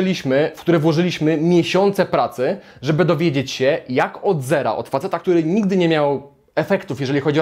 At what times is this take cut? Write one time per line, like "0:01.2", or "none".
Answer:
none